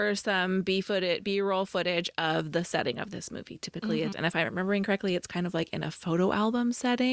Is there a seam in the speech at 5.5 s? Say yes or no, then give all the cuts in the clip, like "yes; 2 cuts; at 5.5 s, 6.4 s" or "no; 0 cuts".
no; 1 cut; at 4.1 s